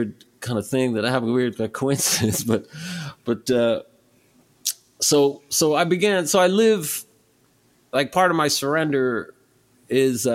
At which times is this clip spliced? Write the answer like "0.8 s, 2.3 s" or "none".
none